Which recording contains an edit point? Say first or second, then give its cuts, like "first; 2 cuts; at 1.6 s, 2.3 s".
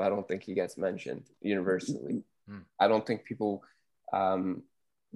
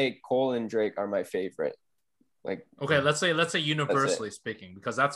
first; 1 cut; at 2.4 s